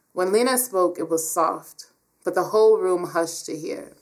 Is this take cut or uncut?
uncut